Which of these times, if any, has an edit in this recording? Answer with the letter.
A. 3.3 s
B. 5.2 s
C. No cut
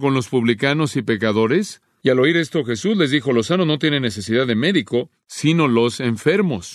C